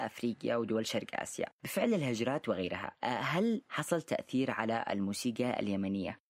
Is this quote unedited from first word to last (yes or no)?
no